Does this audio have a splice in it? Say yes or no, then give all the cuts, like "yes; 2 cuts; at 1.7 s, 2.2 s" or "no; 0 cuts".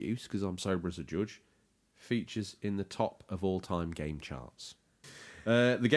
yes; 1 cut; at 5.0 s